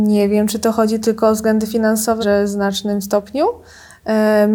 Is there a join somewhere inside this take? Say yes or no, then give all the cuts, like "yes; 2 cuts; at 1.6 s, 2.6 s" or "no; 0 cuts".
yes; 1 cut; at 2.2 s